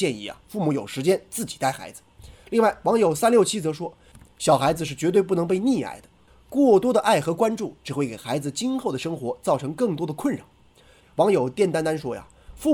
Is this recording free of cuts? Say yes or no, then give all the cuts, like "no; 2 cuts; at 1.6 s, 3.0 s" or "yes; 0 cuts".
no; 1 cut; at 11.0 s